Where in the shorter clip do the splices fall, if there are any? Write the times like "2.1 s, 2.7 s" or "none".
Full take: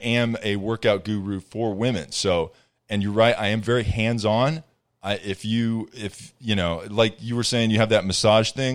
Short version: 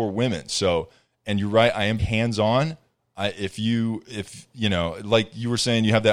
2.0 s